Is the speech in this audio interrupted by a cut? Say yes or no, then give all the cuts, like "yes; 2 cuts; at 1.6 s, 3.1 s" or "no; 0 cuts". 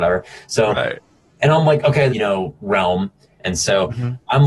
yes; 2 cuts; at 2.1 s, 3.4 s